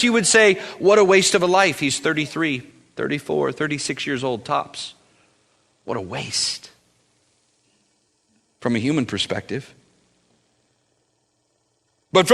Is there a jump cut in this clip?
no; 0 cuts

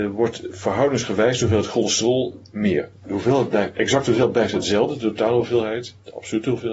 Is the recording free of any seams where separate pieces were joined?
yes; 0 cuts

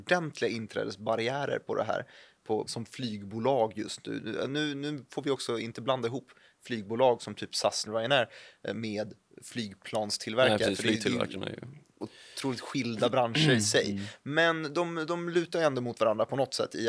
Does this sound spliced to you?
yes; 2 cuts; at 2.7 s, 7.9 s

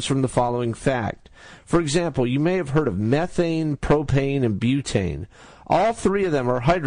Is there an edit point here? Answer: yes; 1 cut; at 1.6 s

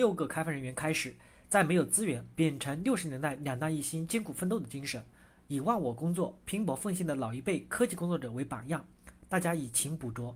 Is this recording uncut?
no; 1 cut; at 2.3 s

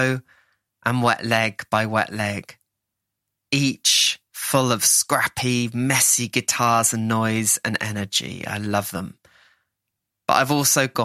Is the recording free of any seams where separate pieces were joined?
yes; 0 cuts

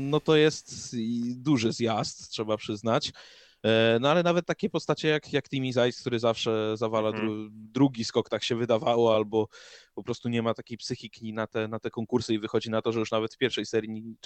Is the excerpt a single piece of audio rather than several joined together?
yes; 0 cuts

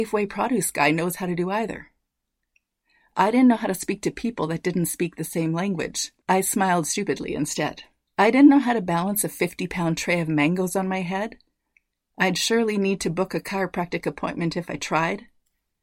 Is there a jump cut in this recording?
no; 0 cuts

